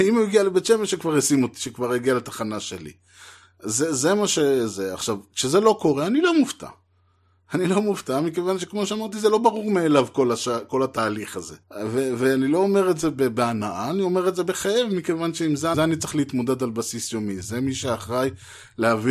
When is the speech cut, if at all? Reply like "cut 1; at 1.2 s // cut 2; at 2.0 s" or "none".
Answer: cut 1; at 11.6 s // cut 2; at 15.7 s

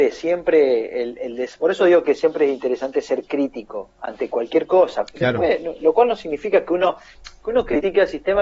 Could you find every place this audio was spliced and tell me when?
none

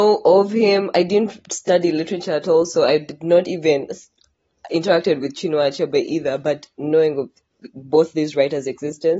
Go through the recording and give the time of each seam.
none

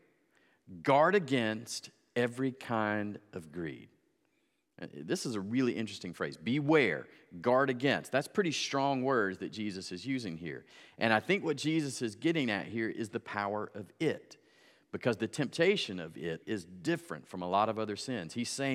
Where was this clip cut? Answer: cut 1; at 16.4 s

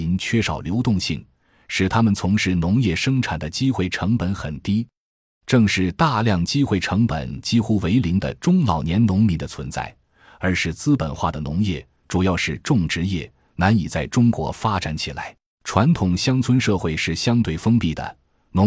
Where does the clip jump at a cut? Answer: cut 1; at 15.5 s

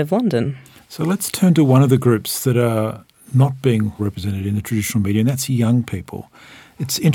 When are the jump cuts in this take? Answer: cut 1; at 4.0 s

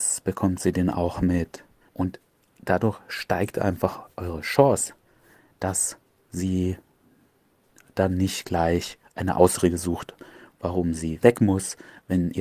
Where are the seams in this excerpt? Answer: cut 1; at 1.9 s

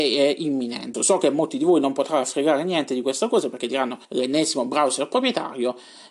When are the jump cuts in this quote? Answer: cut 1; at 0.9 s // cut 2; at 4.0 s

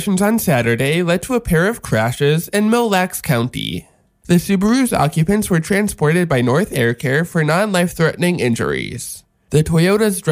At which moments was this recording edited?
cut 1; at 4.2 s

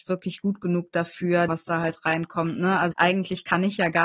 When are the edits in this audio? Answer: cut 1; at 1.5 s // cut 2; at 2.9 s

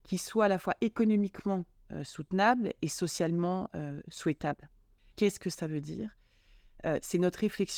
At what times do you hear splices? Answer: cut 1; at 5.1 s

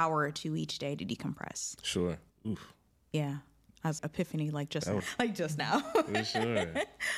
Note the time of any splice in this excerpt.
cut 1; at 2.3 s // cut 2; at 4.0 s // cut 3; at 5.0 s

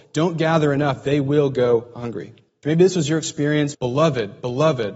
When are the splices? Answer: cut 1; at 2.6 s // cut 2; at 3.7 s

